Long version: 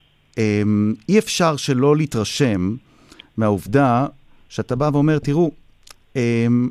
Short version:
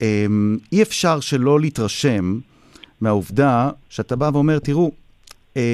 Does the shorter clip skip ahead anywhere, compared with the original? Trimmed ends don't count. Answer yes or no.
yes